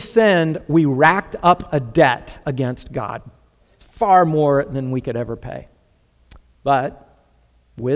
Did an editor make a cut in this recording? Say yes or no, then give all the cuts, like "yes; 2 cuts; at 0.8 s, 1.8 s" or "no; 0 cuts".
yes; 1 cut; at 3.6 s